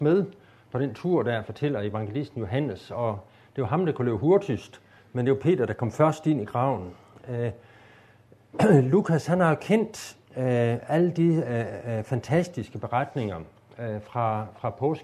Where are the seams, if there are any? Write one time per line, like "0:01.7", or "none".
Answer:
0:10.3